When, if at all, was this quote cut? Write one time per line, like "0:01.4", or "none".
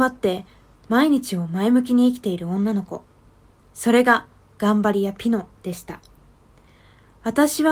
none